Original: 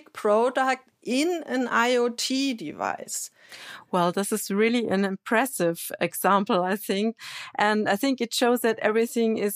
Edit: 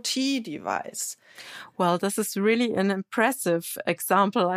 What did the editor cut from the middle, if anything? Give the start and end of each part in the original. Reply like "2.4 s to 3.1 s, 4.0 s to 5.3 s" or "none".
none